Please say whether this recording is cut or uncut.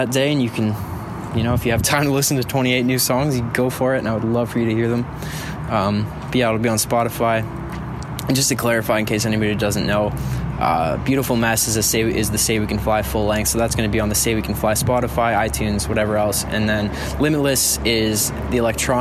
uncut